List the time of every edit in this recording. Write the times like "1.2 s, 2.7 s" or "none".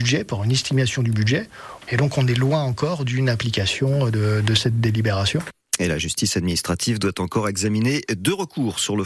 none